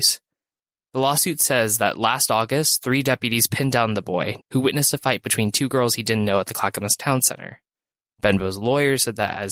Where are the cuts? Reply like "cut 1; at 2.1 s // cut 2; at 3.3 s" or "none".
cut 1; at 4.4 s

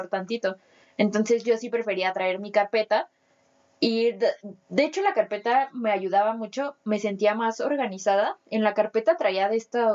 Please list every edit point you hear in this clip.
none

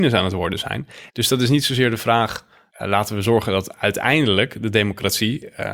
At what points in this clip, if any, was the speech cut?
cut 1; at 1.1 s // cut 2; at 2.7 s

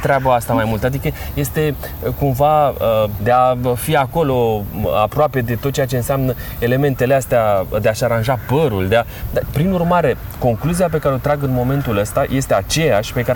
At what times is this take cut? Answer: cut 1; at 3.2 s // cut 2; at 9.5 s

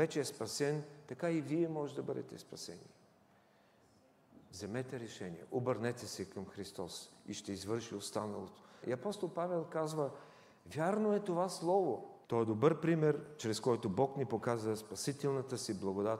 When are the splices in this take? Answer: cut 1; at 8.8 s // cut 2; at 12.2 s

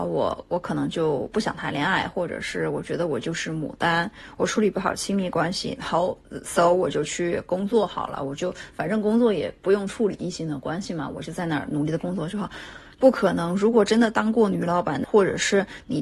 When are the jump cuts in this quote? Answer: cut 1; at 12.9 s // cut 2; at 15.0 s

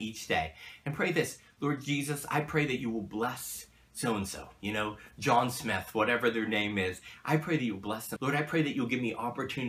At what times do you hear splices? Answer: cut 1; at 8.2 s

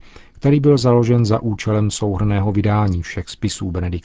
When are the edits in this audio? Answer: none

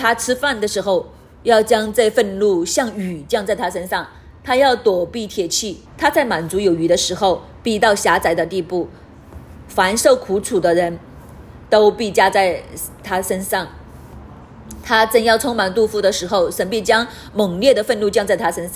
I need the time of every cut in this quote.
cut 1; at 5.9 s

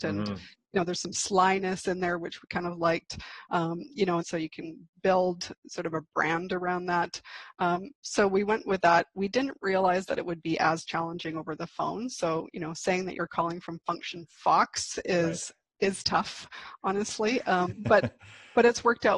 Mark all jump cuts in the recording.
cut 1; at 4.2 s

